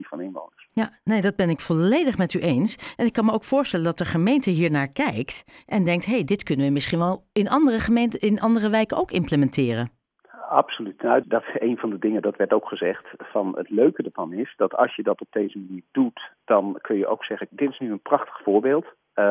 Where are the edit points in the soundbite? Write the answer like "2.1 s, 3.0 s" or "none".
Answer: 11.2 s, 17.5 s

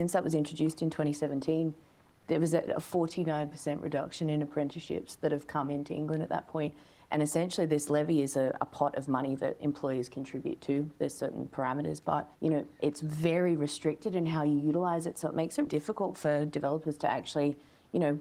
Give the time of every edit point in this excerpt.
2.7 s, 12.4 s, 15.7 s

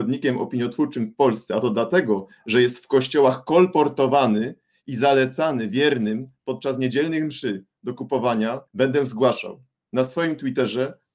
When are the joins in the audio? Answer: 8.7 s

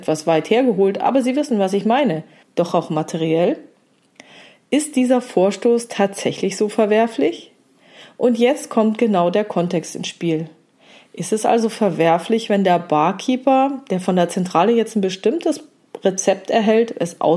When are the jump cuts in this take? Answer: 2.4 s, 11.1 s

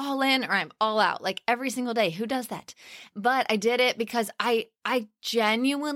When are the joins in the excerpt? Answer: none

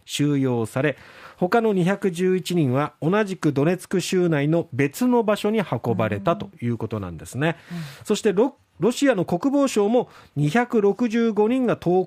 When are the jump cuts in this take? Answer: none

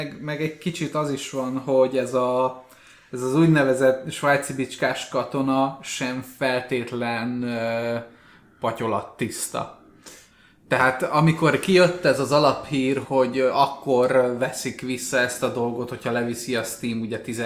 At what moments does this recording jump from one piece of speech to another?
13.0 s

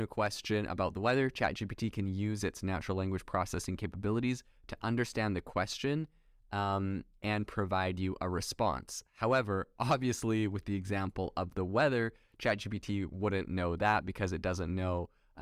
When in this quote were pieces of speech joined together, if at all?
none

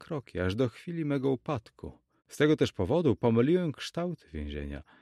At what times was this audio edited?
2.2 s

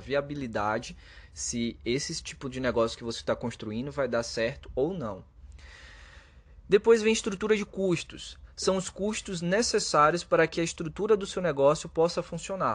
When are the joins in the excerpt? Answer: none

